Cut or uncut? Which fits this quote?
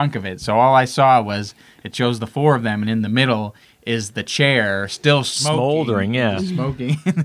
uncut